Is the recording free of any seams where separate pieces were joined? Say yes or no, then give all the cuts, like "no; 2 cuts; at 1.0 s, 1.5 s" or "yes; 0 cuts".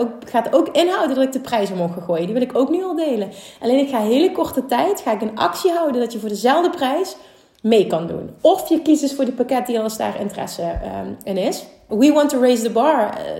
no; 1 cut; at 11.9 s